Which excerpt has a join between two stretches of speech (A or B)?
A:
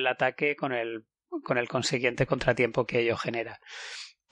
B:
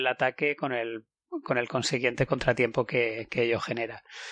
A